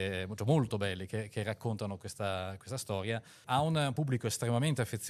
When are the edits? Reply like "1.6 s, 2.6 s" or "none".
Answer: 3.4 s